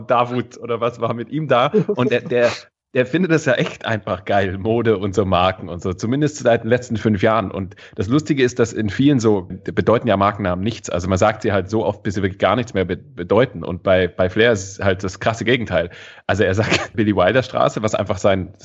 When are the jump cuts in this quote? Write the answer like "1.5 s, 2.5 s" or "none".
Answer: 9.5 s, 16.9 s